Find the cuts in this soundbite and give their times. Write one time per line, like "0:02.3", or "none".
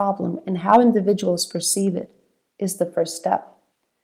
none